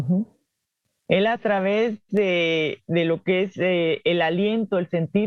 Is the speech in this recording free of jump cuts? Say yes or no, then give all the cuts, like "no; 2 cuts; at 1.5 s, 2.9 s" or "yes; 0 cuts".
yes; 0 cuts